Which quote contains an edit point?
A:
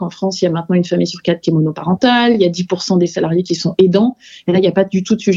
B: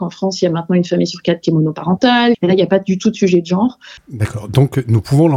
B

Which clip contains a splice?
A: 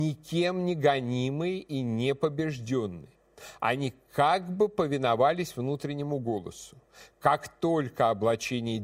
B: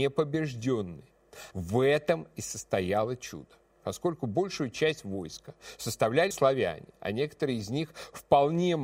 B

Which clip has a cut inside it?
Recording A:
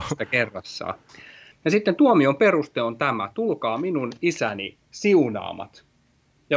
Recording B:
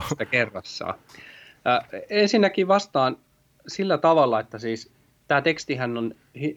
A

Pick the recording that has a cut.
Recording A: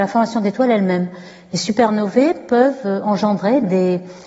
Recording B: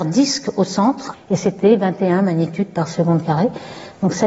B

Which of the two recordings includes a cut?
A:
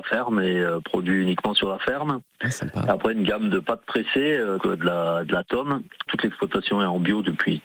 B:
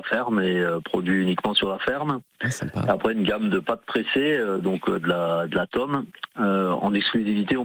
A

